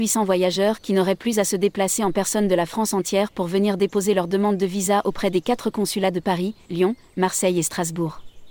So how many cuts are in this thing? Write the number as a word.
zero